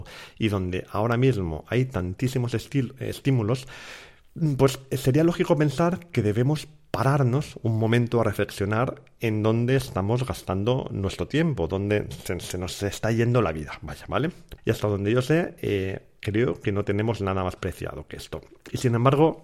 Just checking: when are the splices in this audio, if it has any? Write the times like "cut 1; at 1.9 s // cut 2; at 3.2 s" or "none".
cut 1; at 14.6 s // cut 2; at 17.6 s